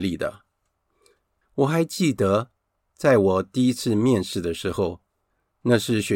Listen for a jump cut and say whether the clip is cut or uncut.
cut